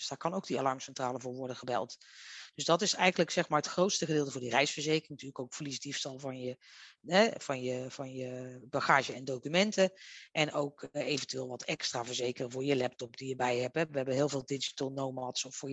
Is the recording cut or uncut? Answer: uncut